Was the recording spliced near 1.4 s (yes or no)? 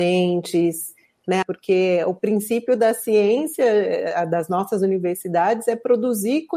yes